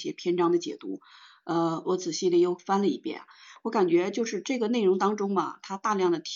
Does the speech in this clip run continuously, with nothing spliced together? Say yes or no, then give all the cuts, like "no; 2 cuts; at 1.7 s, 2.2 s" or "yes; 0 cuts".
no; 1 cut; at 1.8 s